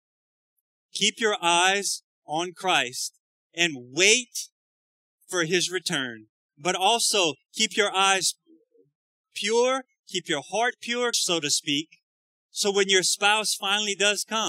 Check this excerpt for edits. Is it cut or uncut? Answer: cut